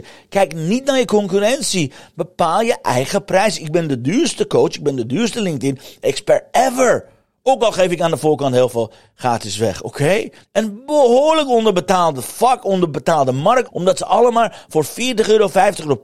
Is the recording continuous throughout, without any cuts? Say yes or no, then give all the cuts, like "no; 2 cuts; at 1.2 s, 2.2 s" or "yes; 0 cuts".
no; 2 cuts; at 10.4 s, 13.7 s